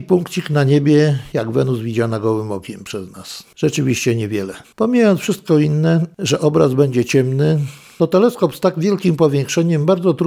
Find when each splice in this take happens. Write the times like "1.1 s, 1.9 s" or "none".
none